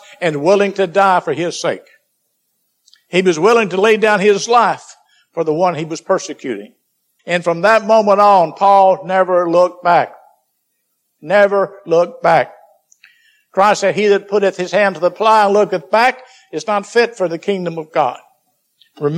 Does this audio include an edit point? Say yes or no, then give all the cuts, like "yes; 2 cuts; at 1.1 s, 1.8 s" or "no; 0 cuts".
yes; 2 cuts; at 7.2 s, 11.2 s